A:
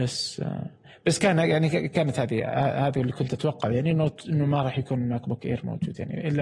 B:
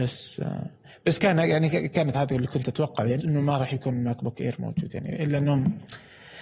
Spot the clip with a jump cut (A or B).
B